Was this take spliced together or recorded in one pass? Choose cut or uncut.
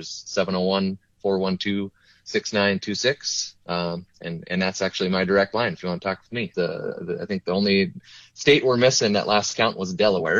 cut